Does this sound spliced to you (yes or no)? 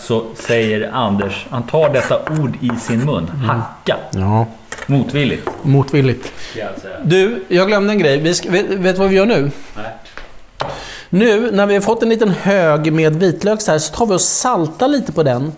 no